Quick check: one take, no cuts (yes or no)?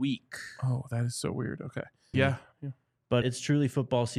no